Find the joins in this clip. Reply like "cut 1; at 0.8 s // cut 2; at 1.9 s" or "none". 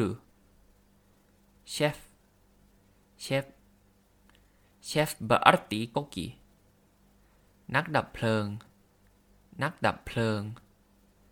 none